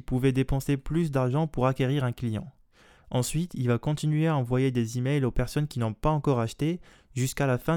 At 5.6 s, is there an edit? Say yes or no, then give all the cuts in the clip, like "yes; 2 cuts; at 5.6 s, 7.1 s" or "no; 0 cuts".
no; 1 cut; at 3.0 s